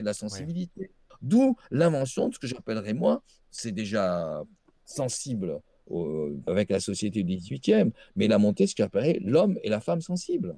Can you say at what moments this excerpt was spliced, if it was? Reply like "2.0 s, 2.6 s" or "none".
1.1 s, 6.5 s